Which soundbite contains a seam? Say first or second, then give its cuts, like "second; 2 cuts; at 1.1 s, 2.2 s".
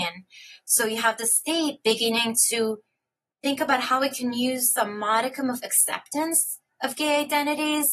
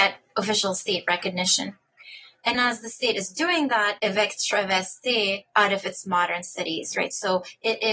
second; 2 cuts; at 2.5 s, 4.0 s